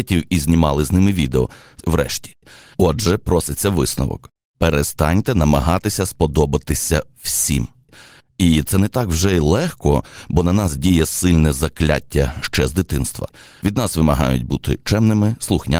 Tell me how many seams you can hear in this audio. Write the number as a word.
one